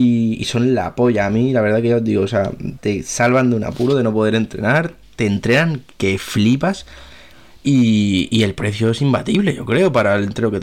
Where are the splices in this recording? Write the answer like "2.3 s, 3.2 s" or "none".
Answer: 2.8 s